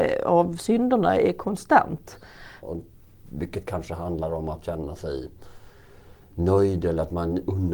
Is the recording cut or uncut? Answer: cut